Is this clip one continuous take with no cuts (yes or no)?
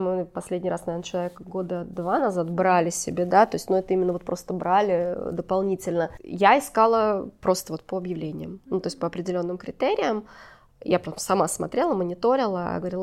yes